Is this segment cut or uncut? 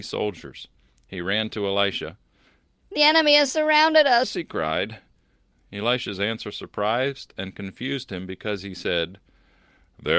cut